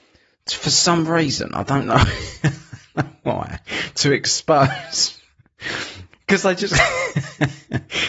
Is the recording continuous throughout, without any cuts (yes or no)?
yes